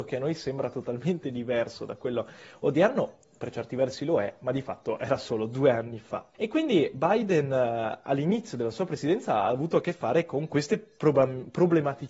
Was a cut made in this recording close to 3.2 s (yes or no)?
no